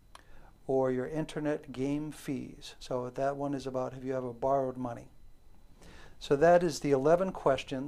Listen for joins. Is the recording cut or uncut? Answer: uncut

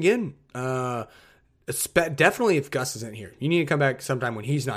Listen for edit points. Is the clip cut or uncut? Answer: uncut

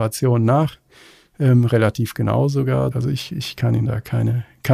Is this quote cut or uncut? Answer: cut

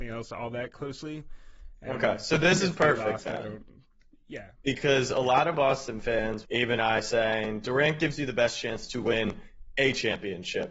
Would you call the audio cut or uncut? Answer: cut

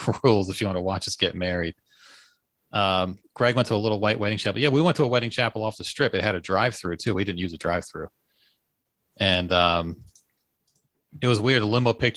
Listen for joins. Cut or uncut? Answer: uncut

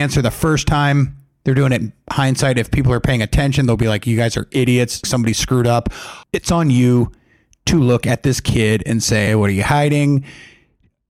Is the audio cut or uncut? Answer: cut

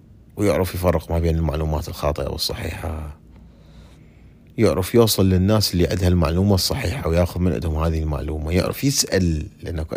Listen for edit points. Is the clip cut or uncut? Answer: uncut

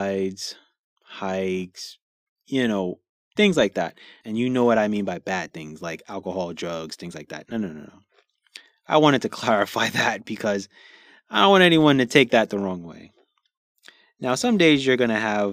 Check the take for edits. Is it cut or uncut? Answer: cut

